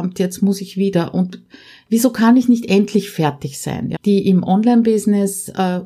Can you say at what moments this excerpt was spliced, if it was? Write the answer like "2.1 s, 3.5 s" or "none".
3.9 s